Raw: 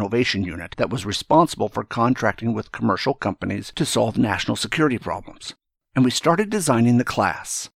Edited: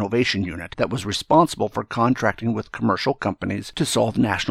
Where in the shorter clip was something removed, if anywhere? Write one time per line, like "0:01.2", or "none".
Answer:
none